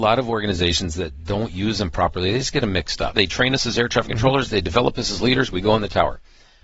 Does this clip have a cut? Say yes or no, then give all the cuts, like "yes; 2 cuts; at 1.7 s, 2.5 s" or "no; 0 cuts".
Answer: yes; 1 cut; at 3.1 s